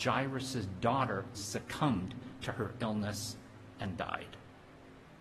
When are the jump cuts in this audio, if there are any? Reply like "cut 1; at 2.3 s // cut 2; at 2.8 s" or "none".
cut 1; at 1.3 s